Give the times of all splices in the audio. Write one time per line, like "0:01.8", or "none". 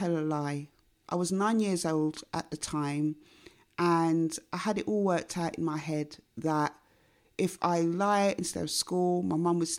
0:01.0